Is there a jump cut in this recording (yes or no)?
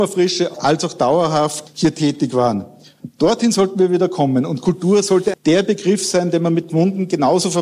yes